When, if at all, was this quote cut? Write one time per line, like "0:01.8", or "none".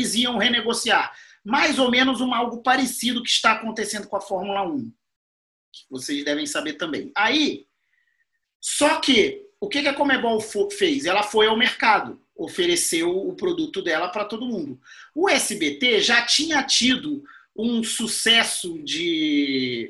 none

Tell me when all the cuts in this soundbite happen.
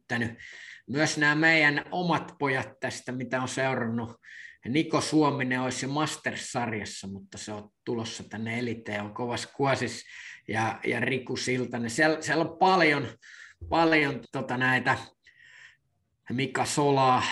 0:14.2

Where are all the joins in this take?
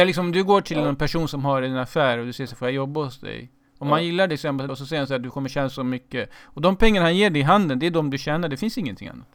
0:04.7

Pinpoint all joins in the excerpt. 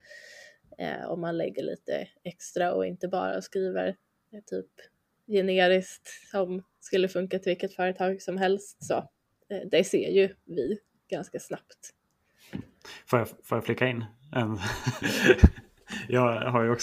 none

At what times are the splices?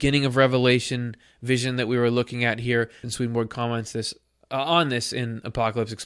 0:03.0

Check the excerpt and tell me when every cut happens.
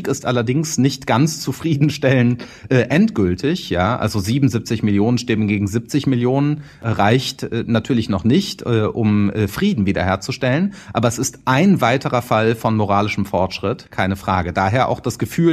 0:13.9

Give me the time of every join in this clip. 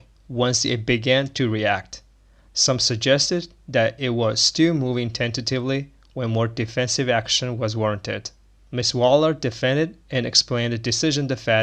none

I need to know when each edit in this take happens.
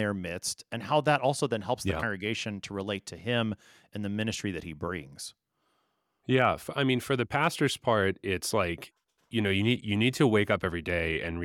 none

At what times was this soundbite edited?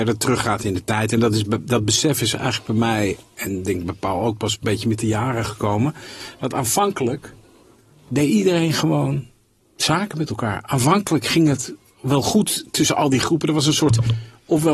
none

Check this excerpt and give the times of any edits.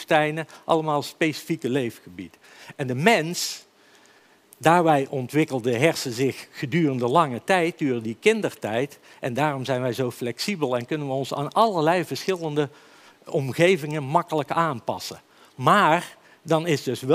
none

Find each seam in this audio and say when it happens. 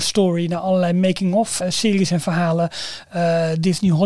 0:01.6

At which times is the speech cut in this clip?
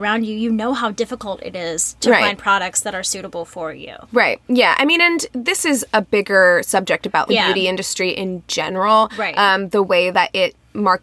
0:04.0
0:07.3

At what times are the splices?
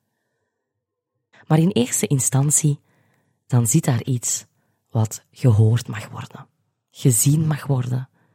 0:01.3

